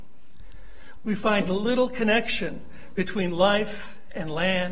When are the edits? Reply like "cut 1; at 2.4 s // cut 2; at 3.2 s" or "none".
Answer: cut 1; at 1.0 s